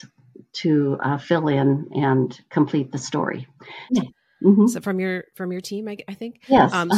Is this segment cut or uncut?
cut